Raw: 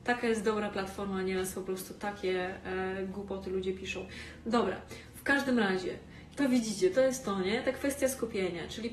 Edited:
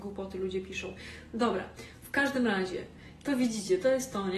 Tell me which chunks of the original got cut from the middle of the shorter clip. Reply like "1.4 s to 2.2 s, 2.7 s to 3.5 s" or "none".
none